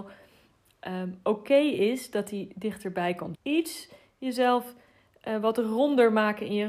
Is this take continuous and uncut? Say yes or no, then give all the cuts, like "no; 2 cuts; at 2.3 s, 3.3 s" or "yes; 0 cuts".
no; 1 cut; at 3.4 s